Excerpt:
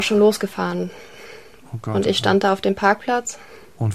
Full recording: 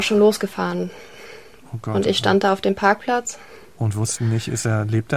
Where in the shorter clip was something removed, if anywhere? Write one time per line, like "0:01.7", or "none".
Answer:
none